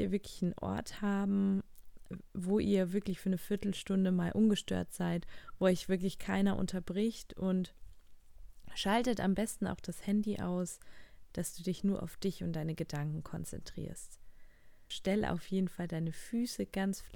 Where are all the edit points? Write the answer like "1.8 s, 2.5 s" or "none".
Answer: 11.3 s, 14.9 s